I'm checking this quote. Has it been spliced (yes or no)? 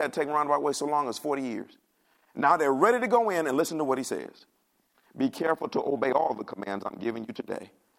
no